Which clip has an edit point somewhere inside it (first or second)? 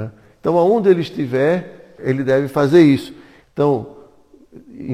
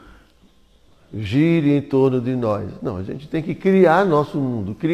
first